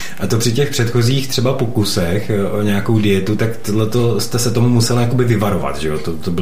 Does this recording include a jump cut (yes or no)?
no